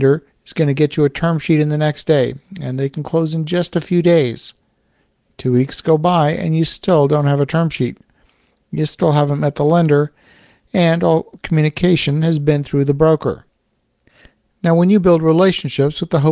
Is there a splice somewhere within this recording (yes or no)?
no